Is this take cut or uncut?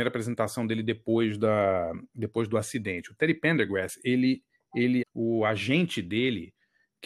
cut